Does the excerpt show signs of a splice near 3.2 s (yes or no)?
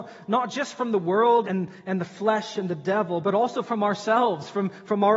yes